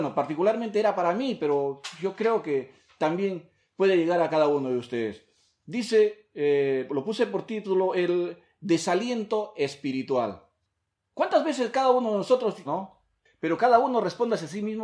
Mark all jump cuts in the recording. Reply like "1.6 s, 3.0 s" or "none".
6.9 s, 12.7 s